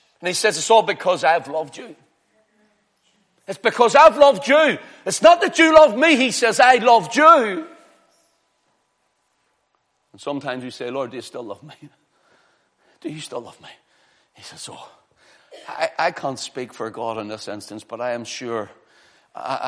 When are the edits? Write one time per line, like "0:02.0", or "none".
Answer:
none